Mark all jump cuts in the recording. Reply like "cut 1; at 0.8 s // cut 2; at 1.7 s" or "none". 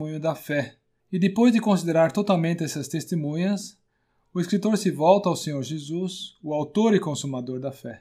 cut 1; at 1.0 s